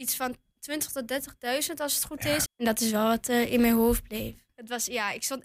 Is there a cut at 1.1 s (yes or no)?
no